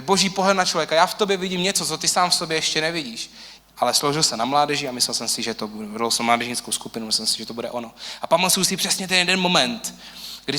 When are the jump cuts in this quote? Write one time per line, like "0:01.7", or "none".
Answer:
0:03.6